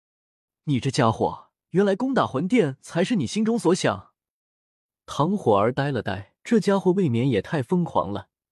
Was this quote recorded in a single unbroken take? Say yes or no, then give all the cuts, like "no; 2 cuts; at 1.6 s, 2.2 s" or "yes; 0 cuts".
no; 2 cuts; at 1.6 s, 6.4 s